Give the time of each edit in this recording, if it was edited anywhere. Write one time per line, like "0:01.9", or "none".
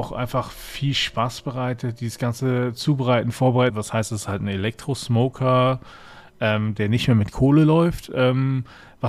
0:03.7